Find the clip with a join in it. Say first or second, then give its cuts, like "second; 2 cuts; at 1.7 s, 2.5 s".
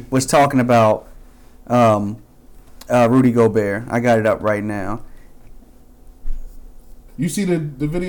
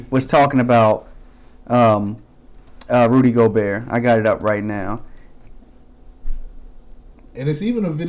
first; 1 cut; at 7.1 s